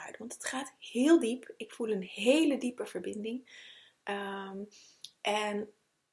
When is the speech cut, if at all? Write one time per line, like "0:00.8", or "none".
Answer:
none